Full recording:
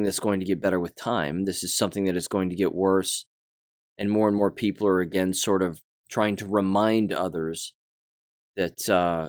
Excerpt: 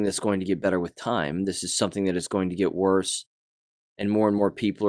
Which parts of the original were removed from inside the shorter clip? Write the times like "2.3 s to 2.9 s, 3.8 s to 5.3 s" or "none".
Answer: none